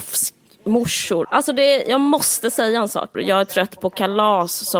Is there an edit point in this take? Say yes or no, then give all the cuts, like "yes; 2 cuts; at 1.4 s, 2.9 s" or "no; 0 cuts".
yes; 2 cuts; at 1.2 s, 3.1 s